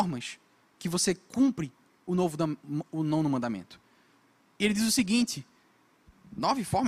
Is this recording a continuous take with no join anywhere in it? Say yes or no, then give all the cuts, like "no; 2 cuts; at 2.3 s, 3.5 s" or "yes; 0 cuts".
yes; 0 cuts